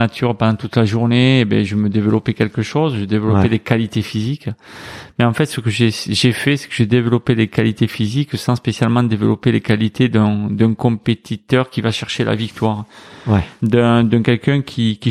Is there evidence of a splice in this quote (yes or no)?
no